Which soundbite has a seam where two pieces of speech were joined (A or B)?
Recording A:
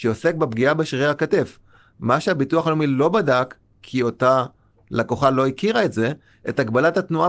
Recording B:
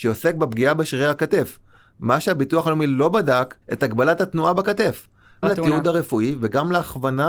B